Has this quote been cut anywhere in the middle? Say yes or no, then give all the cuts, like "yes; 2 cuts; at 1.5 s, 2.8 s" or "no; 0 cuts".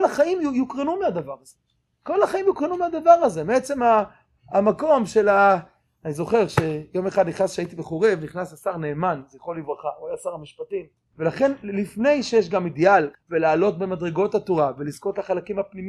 yes; 2 cuts; at 11.1 s, 13.1 s